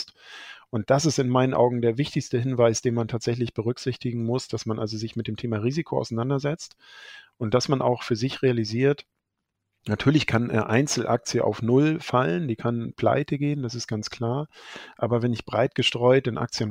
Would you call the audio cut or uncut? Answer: uncut